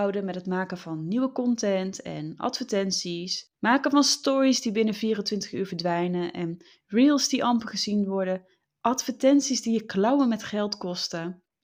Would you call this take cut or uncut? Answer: uncut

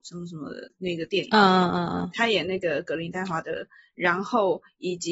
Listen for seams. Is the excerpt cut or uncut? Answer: uncut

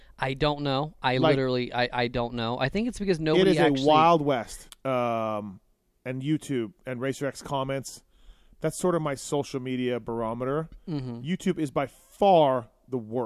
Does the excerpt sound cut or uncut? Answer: cut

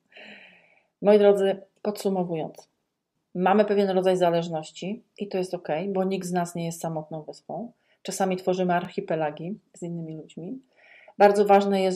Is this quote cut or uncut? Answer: uncut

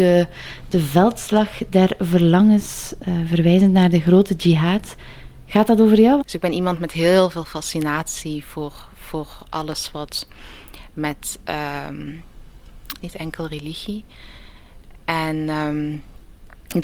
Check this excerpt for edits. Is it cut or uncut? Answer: cut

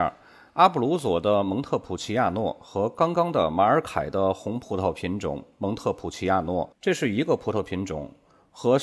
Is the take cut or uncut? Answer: uncut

